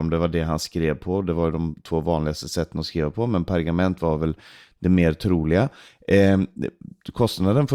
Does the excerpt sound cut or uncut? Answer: uncut